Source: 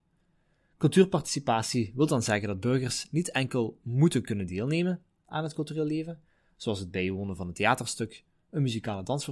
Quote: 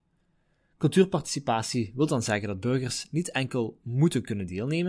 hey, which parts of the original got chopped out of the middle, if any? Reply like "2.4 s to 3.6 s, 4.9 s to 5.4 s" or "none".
none